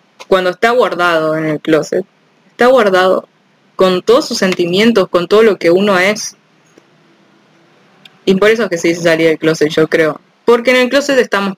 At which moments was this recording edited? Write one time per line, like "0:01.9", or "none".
0:10.3